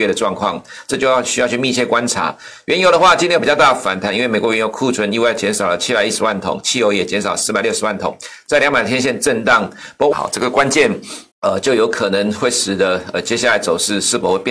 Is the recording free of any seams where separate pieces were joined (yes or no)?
no